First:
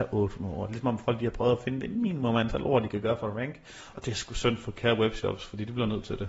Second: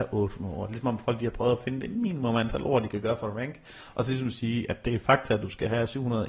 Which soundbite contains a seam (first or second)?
first